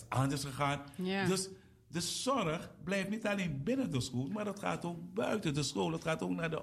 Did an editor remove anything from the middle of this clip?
no; 0 cuts

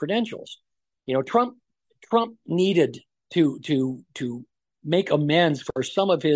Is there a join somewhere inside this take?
no; 0 cuts

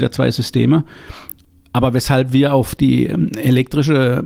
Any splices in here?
no; 0 cuts

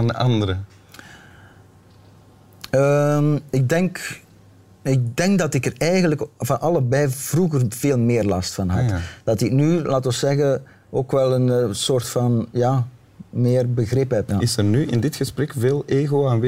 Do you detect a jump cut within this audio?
yes; 1 cut; at 14.3 s

